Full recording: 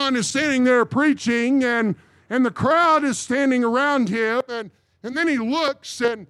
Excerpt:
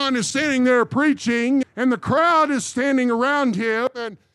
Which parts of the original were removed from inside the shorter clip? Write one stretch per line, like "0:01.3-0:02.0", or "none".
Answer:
0:01.6-0:02.2